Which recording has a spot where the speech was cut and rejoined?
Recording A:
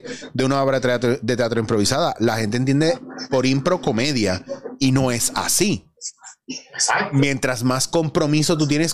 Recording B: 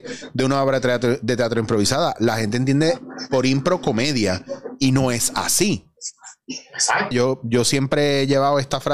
B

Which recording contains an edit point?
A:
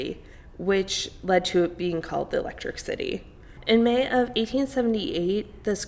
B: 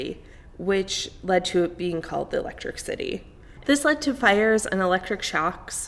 B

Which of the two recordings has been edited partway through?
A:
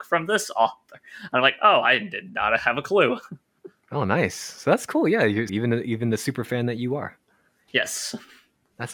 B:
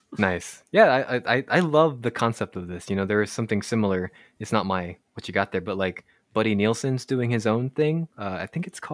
A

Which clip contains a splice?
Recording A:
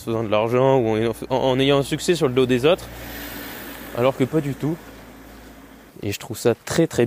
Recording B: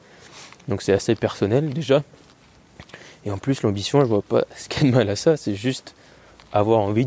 A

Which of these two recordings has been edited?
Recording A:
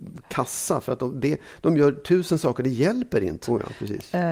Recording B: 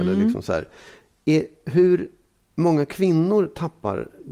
A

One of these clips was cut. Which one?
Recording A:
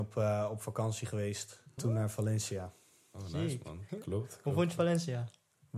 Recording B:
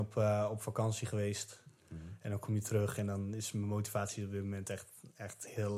A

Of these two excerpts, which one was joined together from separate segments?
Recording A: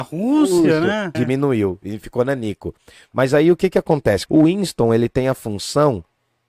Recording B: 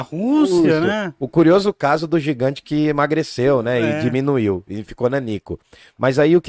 A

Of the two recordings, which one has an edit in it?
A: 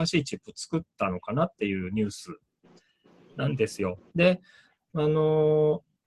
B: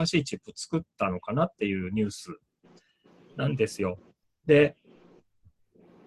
A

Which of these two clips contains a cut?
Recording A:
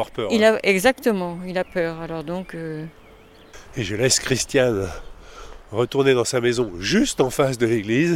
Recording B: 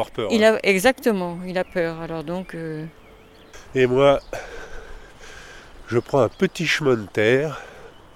B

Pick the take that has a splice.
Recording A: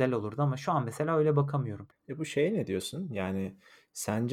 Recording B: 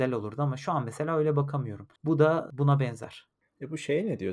A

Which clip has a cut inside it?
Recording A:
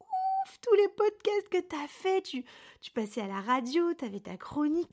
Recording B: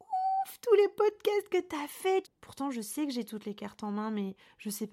B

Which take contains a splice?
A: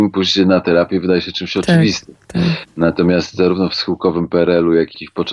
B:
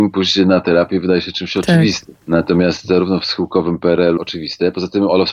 B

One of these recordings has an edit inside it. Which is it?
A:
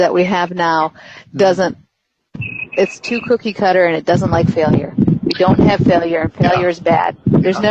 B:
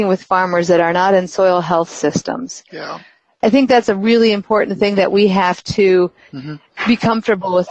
B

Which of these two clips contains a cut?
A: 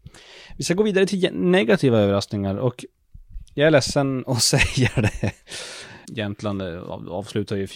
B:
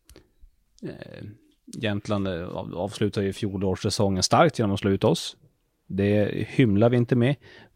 A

